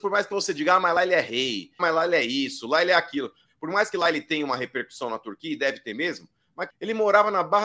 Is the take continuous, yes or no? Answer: no